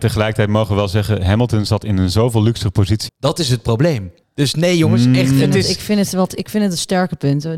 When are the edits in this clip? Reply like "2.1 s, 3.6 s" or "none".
3.1 s